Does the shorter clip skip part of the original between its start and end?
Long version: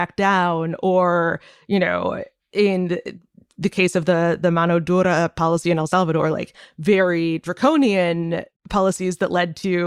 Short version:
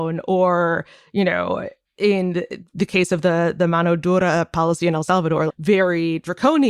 yes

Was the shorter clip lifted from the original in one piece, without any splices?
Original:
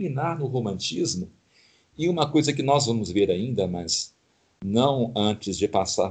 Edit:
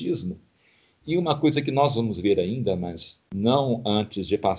no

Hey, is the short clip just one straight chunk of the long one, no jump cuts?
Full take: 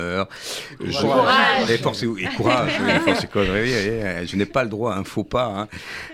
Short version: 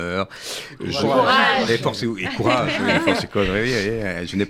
yes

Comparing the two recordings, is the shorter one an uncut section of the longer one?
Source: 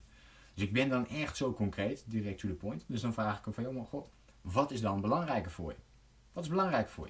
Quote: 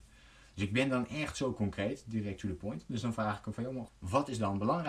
no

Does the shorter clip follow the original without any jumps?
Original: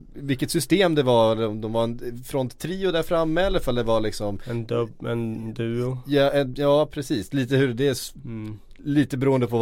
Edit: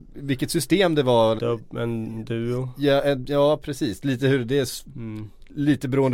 no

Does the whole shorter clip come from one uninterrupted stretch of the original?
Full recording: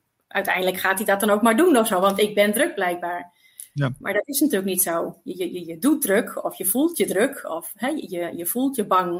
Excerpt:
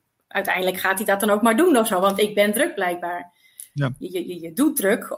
no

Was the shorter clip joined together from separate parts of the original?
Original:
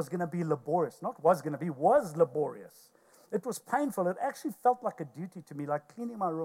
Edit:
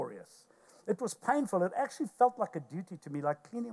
no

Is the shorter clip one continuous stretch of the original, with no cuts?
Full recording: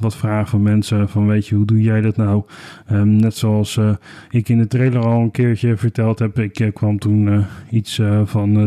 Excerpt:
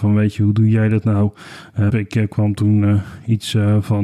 no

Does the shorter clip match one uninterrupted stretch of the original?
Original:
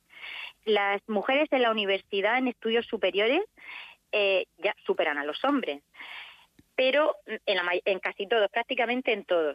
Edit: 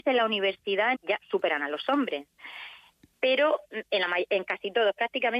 no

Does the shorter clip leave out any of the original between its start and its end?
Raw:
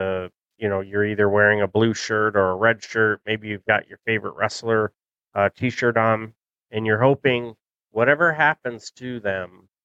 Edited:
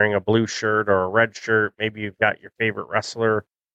no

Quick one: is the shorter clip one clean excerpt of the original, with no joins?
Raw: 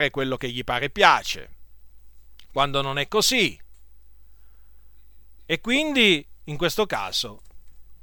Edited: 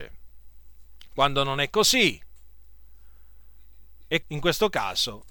no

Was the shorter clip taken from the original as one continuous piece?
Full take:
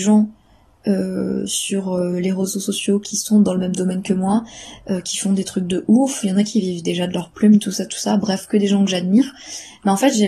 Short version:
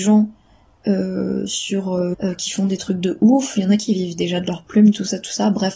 no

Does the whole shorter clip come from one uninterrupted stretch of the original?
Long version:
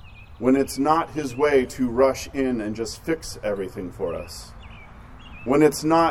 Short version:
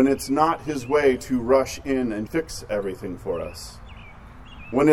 no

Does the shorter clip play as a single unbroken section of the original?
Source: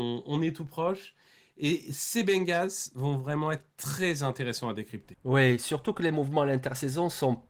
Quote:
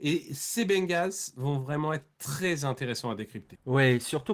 yes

